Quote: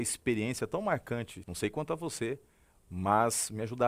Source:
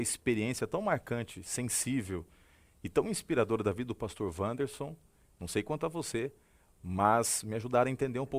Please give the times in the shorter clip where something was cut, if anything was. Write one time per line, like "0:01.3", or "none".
0:01.4